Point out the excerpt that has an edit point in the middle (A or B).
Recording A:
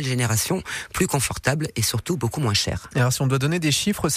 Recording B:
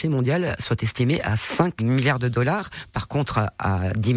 B